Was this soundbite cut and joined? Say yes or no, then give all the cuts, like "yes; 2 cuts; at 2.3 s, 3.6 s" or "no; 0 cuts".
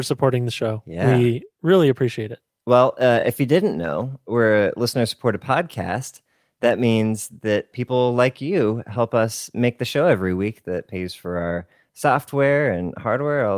no; 0 cuts